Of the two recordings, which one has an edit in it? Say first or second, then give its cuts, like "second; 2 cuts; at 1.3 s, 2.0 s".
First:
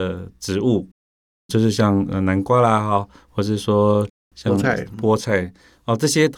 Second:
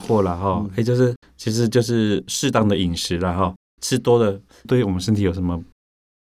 second; 2 cuts; at 1.2 s, 4.6 s